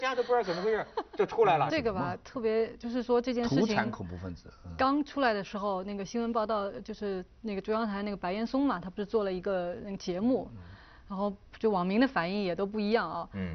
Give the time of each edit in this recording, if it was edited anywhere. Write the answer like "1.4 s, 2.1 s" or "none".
1.7 s